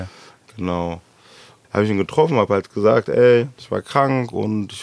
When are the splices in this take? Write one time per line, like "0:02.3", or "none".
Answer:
0:01.6